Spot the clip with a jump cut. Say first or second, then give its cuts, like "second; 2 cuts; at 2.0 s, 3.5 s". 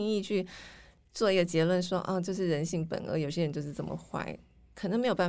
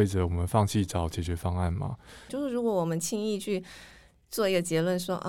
second; 1 cut; at 2.3 s